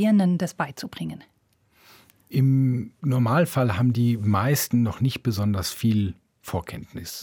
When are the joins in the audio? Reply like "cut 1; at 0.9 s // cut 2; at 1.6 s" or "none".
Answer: none